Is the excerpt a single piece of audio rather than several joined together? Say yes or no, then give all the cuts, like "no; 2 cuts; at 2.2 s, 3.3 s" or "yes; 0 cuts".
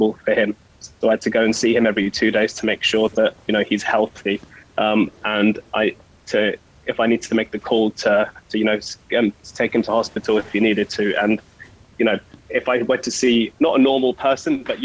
no; 2 cuts; at 12.4 s, 13.5 s